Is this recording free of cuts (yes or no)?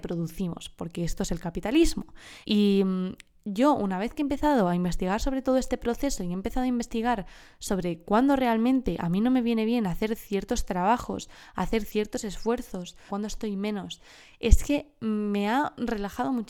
no